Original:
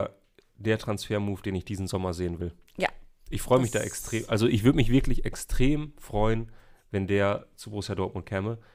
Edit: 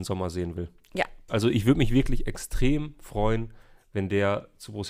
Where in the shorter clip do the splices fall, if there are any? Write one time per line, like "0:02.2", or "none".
0:01.3